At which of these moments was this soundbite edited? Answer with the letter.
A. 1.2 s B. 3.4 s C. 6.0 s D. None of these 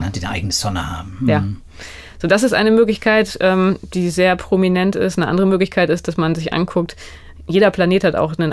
D